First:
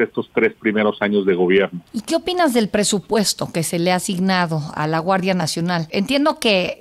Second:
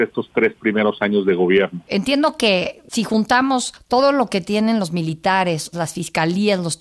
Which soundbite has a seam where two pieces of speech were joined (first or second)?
second